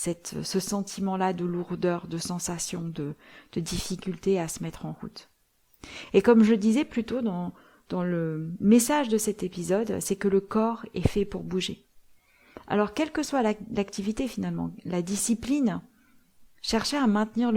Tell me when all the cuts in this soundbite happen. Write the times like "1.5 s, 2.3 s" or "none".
none